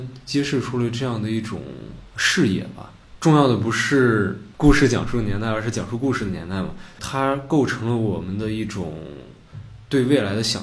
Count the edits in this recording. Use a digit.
1